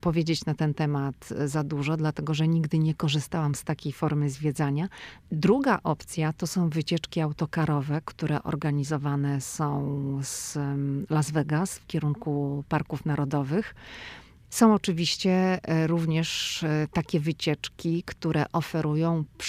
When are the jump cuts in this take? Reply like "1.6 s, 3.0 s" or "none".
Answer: 5.2 s, 14.4 s